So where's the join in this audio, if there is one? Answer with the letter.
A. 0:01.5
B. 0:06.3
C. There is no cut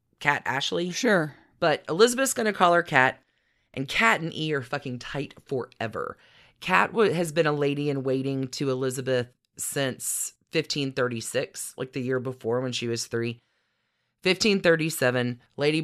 C